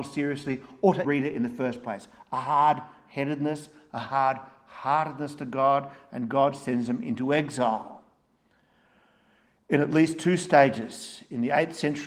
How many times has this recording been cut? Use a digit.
1